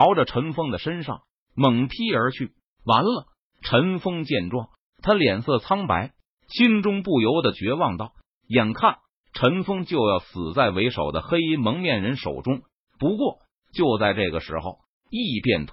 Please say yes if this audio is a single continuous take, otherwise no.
yes